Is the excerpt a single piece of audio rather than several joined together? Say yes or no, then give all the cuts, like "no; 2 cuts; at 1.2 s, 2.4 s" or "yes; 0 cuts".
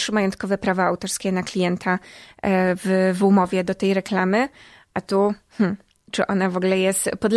yes; 0 cuts